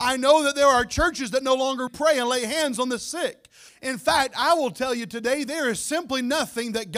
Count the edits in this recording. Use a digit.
2